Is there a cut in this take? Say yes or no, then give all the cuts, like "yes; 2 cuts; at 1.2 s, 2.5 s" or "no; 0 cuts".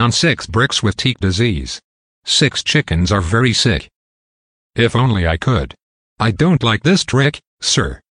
no; 0 cuts